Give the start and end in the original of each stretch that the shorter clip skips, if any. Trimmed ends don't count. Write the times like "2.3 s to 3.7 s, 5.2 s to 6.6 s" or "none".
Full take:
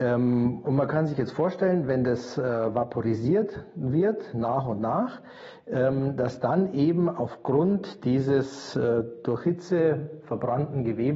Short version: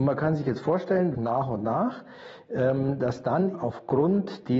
1.9 s to 4.3 s, 6.7 s to 7.1 s